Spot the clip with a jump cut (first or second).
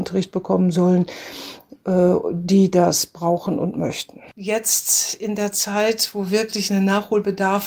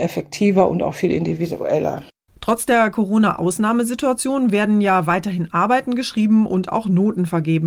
first